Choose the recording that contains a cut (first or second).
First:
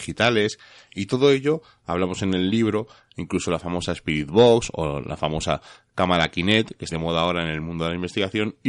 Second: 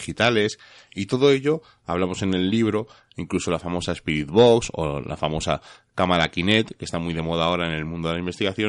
first